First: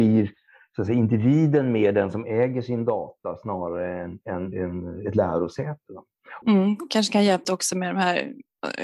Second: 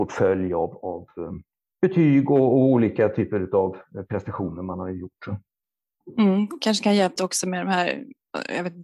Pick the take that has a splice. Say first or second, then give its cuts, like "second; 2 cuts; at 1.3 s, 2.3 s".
first; 1 cut; at 6.4 s